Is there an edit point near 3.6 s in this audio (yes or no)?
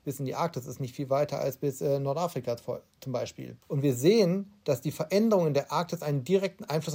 yes